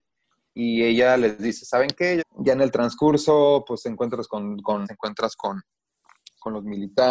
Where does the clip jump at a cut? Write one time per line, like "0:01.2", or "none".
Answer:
0:02.2
0:04.8